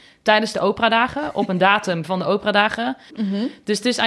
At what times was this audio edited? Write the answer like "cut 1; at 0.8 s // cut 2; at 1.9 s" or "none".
cut 1; at 3.1 s

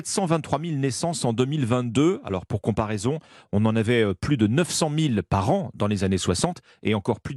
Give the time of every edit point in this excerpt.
none

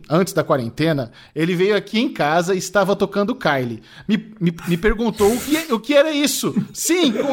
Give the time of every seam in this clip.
none

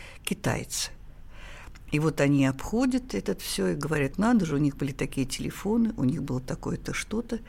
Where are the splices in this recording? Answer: cut 1; at 4.1 s

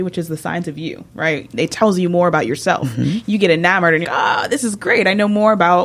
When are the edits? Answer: cut 1; at 4.0 s

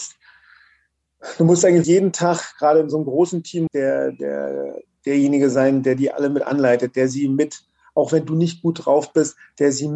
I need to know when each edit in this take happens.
cut 1; at 1.8 s // cut 2; at 3.7 s

